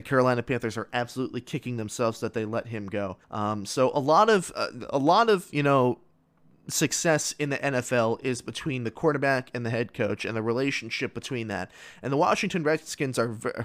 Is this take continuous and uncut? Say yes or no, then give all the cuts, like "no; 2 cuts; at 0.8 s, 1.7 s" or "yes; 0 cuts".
no; 1 cut; at 3.2 s